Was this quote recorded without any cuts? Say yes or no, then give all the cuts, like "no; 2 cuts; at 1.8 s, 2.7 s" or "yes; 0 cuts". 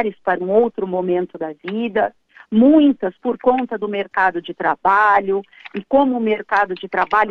yes; 0 cuts